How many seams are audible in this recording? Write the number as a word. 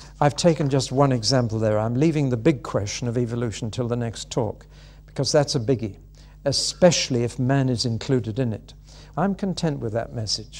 one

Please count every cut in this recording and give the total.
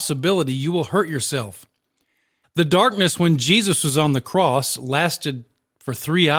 one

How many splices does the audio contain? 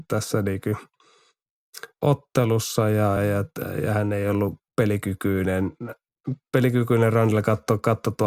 two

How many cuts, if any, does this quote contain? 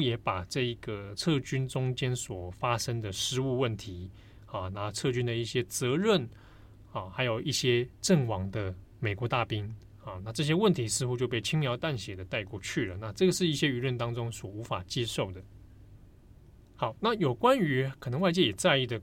zero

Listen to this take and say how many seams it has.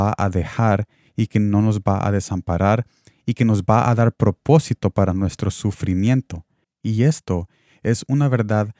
one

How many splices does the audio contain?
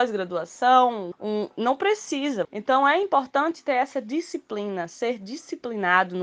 two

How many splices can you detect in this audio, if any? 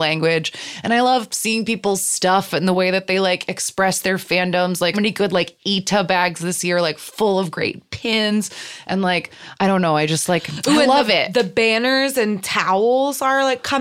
one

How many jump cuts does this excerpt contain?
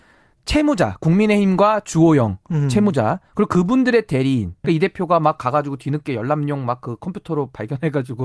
one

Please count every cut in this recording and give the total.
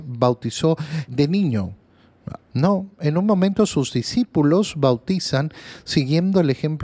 two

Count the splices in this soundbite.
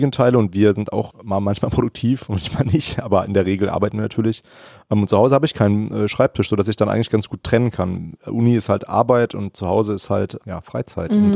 zero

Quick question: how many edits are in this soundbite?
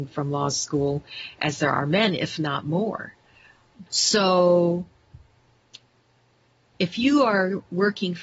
two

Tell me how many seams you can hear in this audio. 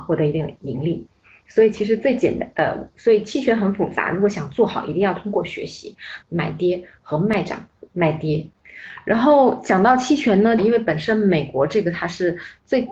two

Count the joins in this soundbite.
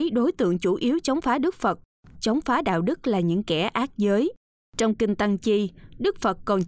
zero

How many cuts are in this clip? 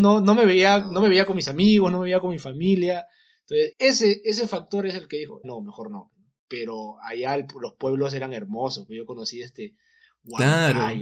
two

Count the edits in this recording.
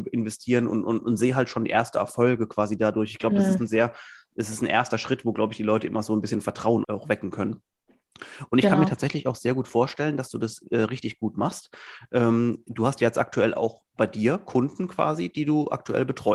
one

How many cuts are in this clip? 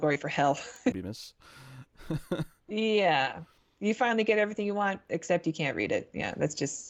one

